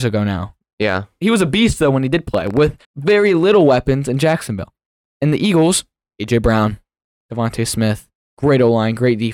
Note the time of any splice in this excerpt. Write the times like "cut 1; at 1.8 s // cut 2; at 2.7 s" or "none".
cut 1; at 2.8 s